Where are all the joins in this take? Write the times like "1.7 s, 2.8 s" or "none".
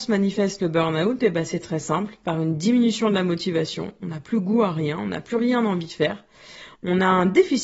6.7 s